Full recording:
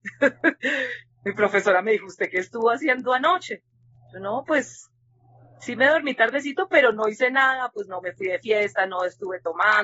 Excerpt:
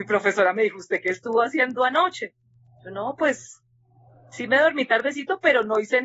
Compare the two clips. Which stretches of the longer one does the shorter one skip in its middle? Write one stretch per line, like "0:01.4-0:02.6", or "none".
none